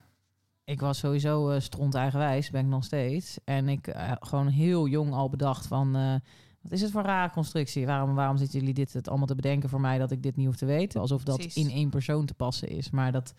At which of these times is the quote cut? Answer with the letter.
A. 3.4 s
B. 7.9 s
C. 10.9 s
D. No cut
C